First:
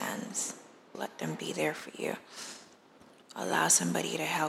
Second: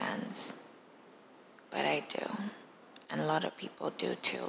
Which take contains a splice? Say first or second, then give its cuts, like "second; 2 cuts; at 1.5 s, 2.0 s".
first; 1 cut; at 0.9 s